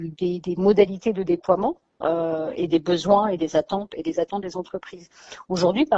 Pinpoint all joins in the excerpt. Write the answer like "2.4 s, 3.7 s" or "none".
3.9 s

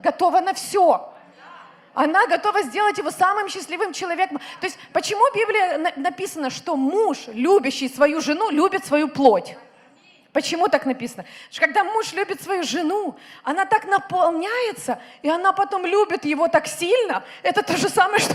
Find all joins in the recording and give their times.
none

